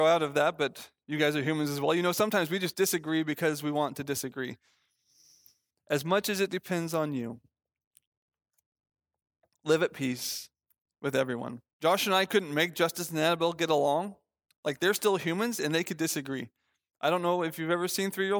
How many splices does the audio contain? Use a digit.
2